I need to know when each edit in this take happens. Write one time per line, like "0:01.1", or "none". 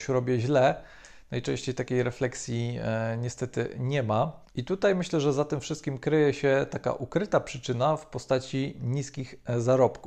none